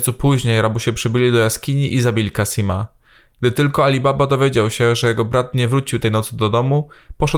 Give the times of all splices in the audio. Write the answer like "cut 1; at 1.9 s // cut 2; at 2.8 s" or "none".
none